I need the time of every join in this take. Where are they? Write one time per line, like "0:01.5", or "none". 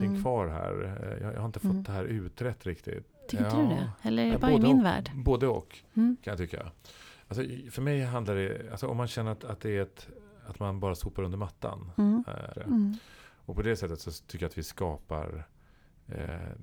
0:03.1
0:12.5